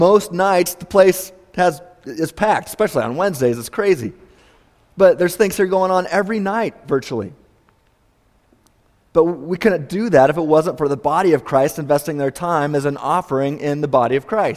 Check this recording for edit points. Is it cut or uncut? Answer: uncut